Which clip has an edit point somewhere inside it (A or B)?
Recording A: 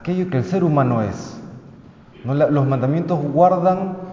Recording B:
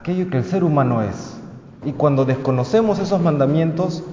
B